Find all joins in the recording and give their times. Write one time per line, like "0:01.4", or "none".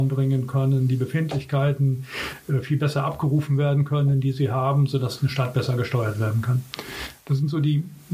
none